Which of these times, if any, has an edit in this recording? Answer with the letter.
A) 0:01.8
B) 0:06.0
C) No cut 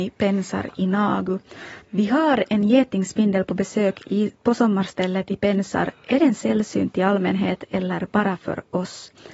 A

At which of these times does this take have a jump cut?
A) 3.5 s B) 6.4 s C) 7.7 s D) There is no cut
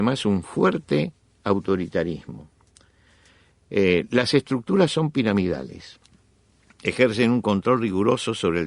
D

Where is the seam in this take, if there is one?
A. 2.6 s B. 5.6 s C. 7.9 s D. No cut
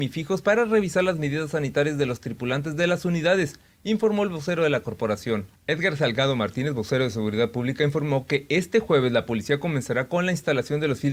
B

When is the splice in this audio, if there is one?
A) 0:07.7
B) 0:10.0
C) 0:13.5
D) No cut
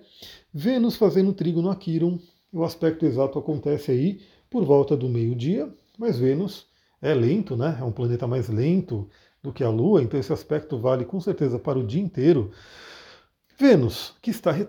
D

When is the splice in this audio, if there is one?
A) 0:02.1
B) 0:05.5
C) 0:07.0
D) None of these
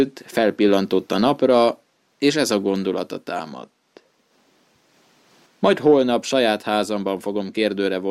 B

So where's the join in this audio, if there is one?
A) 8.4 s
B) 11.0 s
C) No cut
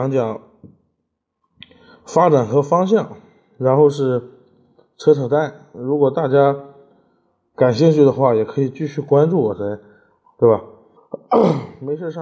B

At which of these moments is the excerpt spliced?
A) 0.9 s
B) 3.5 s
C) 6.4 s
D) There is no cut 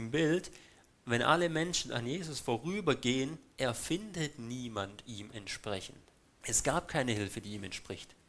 C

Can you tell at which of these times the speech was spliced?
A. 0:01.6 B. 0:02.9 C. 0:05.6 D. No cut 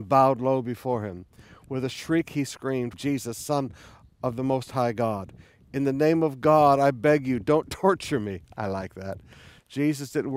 B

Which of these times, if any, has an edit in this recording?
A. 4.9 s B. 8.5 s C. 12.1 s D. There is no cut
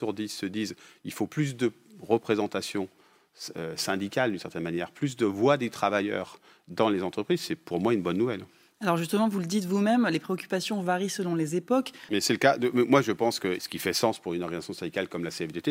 C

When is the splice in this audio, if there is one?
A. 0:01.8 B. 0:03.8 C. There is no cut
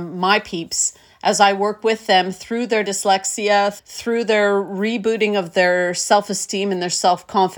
B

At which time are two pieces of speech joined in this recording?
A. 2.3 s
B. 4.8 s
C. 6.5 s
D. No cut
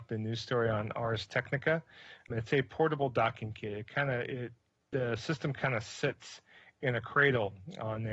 A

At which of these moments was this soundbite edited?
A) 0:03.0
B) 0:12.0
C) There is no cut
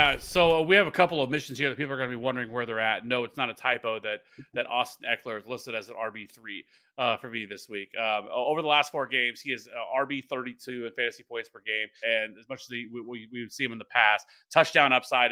B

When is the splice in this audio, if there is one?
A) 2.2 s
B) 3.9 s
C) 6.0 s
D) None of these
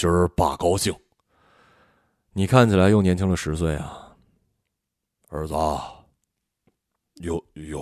D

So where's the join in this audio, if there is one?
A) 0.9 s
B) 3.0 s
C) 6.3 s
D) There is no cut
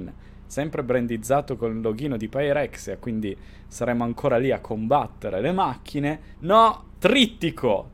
C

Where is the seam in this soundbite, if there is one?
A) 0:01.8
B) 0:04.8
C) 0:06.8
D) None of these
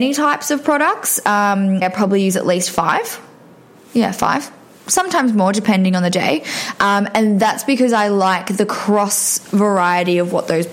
A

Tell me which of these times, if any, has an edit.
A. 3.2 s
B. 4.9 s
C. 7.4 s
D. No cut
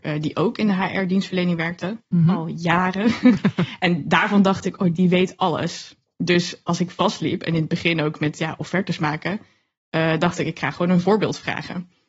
B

